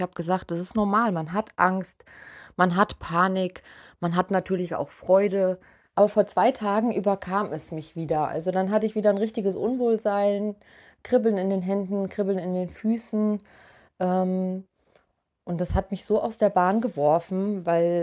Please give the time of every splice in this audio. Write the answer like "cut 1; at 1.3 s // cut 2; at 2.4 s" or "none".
cut 1; at 5.9 s

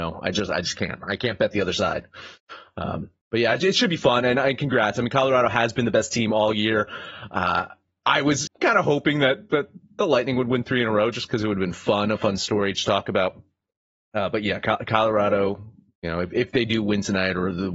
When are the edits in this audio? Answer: cut 1; at 8.5 s

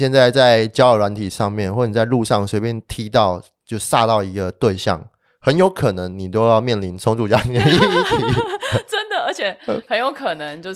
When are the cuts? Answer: none

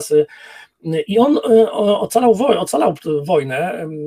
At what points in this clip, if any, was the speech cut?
none

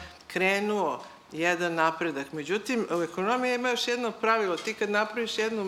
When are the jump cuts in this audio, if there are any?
none

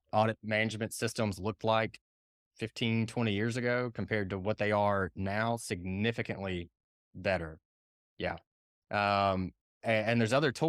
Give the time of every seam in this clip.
none

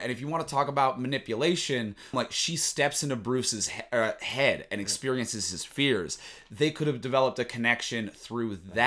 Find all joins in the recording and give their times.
cut 1; at 2.1 s

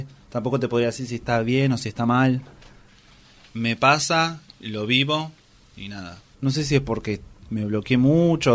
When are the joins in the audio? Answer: cut 1; at 6.3 s

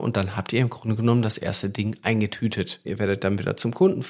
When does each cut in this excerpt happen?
cut 1; at 2.9 s

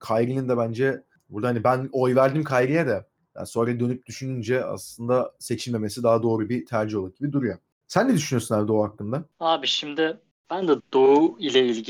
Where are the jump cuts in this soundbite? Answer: cut 1; at 10.8 s

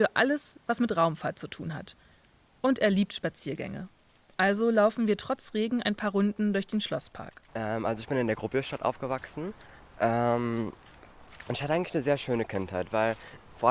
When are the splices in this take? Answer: cut 1; at 7.5 s

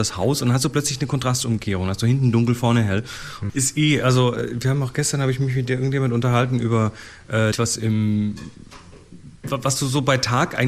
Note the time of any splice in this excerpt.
cut 1; at 3.5 s // cut 2; at 7.5 s

